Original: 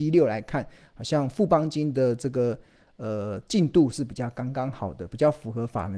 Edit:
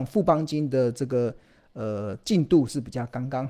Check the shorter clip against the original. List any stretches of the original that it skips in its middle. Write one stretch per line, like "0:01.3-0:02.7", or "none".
none